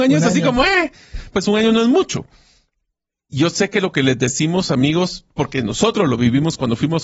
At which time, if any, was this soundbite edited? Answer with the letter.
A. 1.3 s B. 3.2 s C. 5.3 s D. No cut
A